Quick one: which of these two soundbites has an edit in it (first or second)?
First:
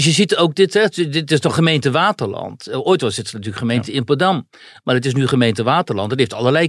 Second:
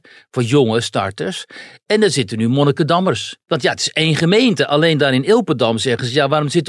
second